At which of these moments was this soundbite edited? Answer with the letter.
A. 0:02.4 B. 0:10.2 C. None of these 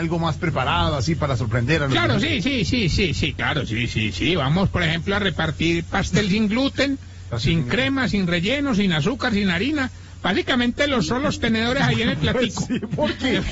C